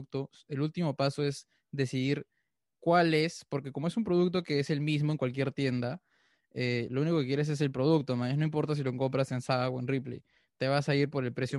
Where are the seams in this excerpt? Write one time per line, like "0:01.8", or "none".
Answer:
none